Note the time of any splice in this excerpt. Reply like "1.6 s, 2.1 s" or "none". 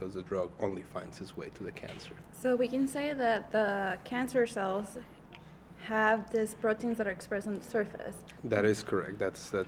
8.4 s